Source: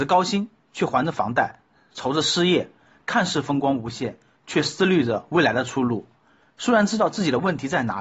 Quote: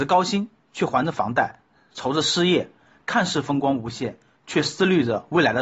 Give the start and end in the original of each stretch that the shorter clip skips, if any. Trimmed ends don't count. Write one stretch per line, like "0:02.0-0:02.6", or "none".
none